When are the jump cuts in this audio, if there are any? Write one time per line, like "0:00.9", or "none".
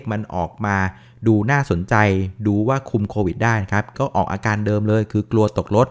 0:03.9